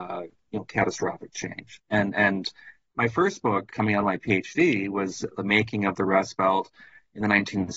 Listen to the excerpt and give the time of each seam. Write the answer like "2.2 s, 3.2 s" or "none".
3.7 s, 5.3 s